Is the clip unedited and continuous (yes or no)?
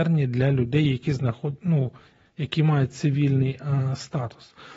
yes